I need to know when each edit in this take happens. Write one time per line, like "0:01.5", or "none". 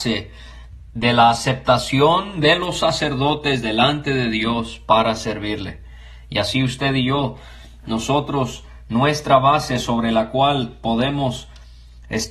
none